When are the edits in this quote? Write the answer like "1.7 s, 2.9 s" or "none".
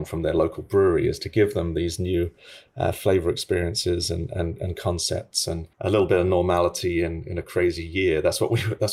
5.7 s